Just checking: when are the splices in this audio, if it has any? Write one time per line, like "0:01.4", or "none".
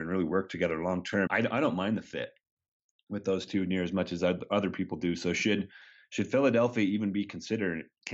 0:01.3